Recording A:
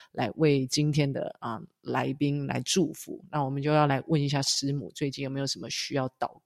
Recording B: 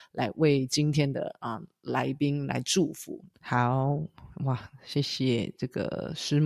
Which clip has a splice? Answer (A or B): B